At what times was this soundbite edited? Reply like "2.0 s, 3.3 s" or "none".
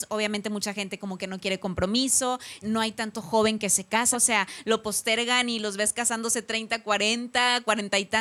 2.6 s, 4.1 s

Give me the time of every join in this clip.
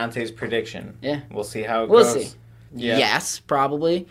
2.7 s

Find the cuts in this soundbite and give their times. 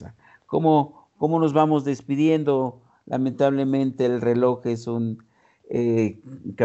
none

